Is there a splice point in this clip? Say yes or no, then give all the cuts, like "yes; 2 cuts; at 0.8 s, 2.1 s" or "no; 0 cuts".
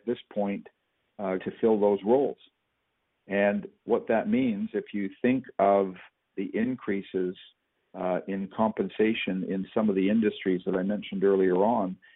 yes; 2 cuts; at 1.4 s, 6.3 s